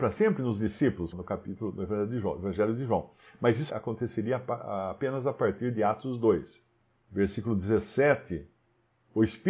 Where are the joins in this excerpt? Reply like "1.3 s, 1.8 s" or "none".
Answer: 1.1 s, 3.7 s